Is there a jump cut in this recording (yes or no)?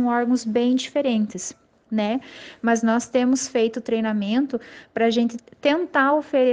no